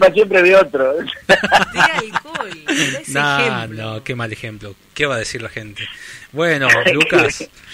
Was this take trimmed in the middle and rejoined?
no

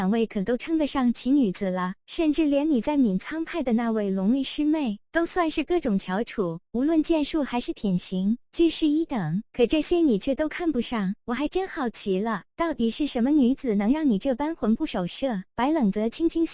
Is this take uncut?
yes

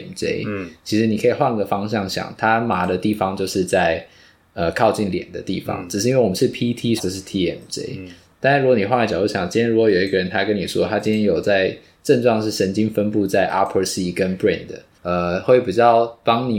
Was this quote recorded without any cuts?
no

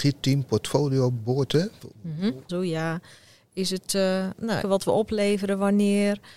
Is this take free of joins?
no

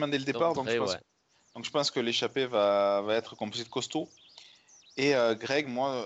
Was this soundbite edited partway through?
no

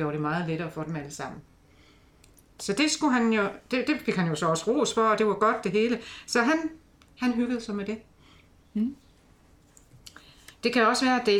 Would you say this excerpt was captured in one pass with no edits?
yes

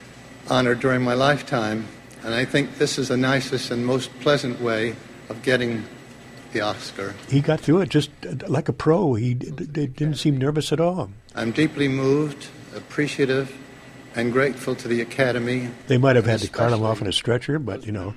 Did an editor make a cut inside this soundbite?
no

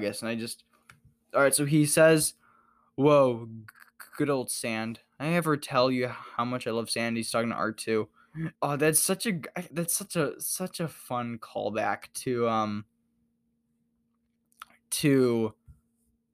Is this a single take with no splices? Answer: no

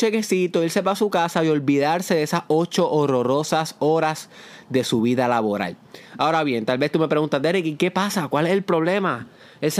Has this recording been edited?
no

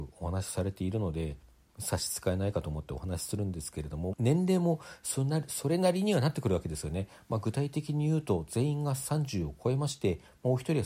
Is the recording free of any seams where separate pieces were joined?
no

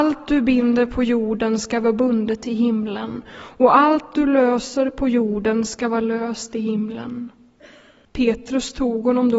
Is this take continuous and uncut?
no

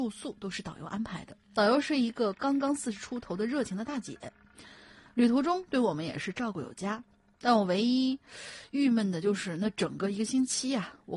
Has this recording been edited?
yes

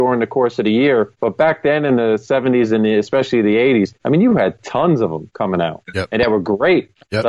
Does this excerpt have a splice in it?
no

